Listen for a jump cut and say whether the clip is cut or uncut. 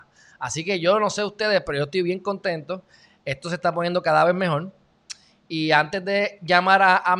uncut